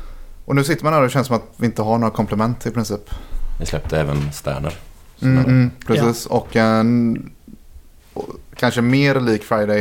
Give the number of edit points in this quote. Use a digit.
1